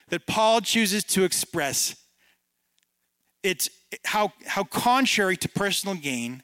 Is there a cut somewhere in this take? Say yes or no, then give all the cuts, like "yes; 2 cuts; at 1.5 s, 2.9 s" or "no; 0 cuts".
no; 0 cuts